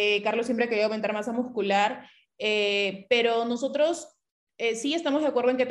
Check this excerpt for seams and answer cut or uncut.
uncut